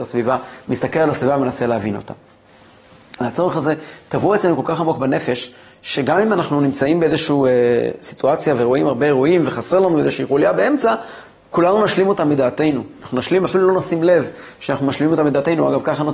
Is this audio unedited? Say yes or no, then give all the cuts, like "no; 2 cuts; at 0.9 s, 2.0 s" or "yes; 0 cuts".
yes; 0 cuts